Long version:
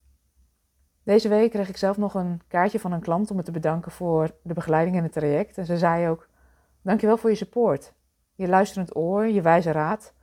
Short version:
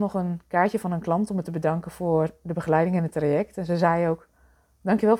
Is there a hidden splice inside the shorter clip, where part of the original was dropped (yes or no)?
no